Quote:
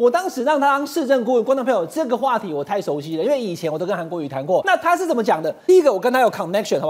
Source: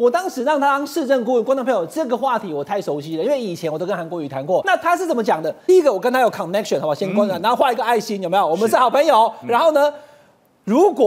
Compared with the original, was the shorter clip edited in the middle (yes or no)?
no